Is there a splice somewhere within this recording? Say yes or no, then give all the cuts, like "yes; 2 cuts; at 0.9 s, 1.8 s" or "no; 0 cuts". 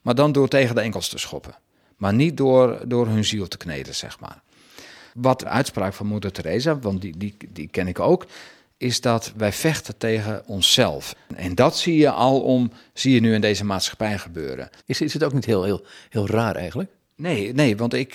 yes; 3 cuts; at 5.4 s, 11.1 s, 14.8 s